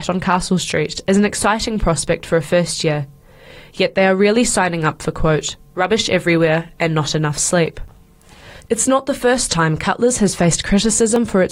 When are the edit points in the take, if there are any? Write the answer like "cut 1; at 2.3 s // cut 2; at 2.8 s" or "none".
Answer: none